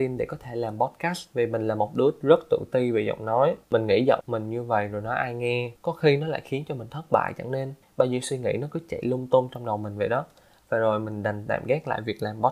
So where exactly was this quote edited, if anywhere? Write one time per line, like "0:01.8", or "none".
0:05.8